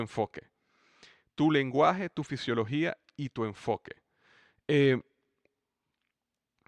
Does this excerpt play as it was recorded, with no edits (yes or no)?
yes